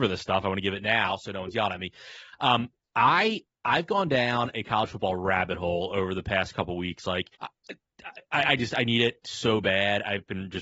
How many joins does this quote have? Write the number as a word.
one